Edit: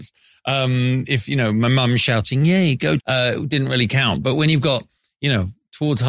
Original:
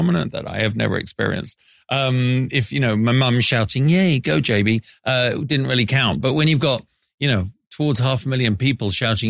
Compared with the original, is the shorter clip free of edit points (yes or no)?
no